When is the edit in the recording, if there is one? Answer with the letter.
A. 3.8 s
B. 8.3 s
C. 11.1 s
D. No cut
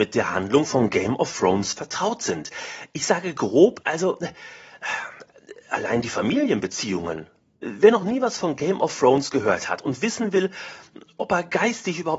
A